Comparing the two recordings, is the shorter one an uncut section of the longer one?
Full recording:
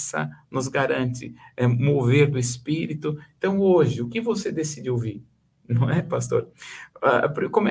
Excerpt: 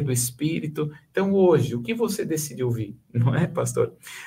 no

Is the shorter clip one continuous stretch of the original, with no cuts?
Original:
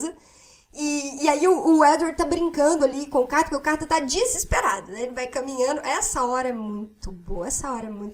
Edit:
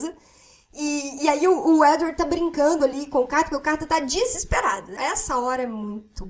no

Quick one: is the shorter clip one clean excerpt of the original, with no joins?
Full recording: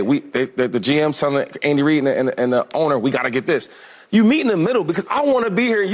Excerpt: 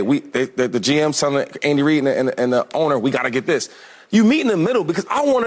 yes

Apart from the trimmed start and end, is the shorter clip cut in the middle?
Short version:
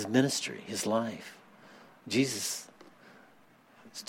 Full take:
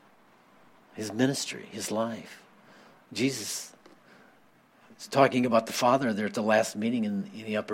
no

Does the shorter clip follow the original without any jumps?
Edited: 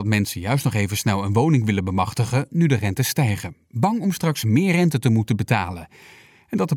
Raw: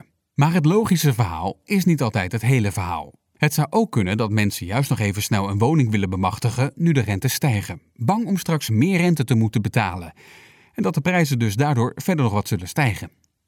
yes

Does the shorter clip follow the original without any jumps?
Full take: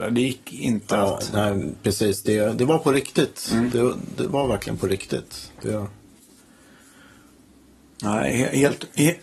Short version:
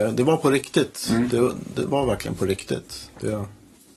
yes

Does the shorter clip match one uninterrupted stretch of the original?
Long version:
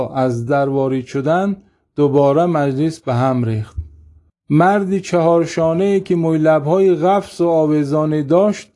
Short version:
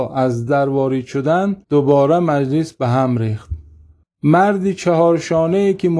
no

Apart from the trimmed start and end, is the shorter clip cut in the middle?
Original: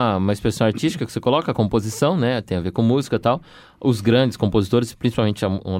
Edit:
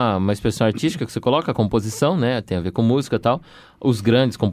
no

